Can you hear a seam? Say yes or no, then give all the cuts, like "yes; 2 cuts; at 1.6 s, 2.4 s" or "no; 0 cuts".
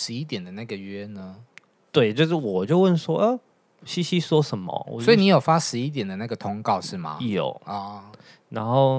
no; 0 cuts